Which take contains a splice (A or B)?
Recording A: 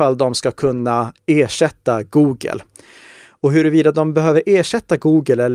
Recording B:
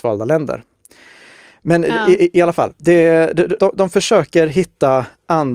B